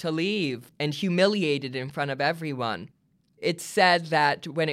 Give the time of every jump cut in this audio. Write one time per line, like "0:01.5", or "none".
none